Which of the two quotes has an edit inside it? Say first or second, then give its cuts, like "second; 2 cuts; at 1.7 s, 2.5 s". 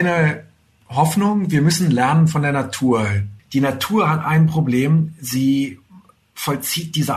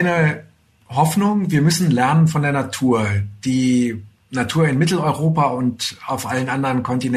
first; 1 cut; at 3.4 s